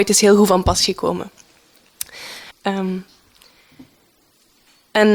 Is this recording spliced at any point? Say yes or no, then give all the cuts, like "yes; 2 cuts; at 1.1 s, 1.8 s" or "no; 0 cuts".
yes; 1 cut; at 2.5 s